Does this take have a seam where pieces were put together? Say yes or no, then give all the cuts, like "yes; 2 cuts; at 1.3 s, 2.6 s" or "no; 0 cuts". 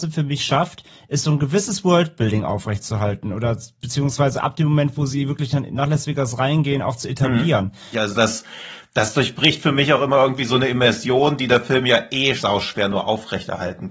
yes; 2 cuts; at 7.9 s, 12.4 s